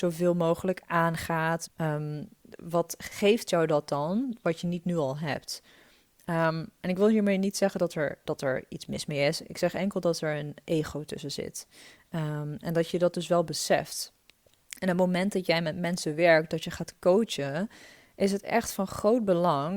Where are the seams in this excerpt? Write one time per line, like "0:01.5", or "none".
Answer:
0:01.7